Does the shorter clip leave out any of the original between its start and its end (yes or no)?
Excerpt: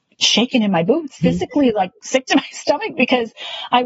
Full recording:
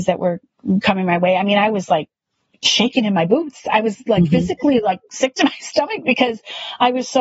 yes